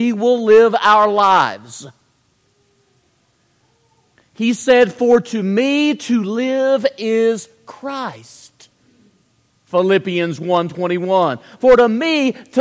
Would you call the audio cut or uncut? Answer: cut